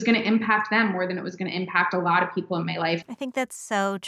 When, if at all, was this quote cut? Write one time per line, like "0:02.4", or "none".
0:03.0